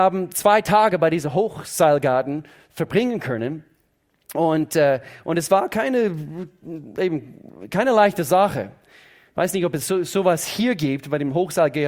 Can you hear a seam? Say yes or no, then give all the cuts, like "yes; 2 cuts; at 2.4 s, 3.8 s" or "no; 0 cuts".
no; 0 cuts